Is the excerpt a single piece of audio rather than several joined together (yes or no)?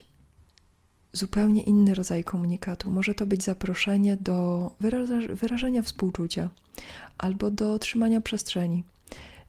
yes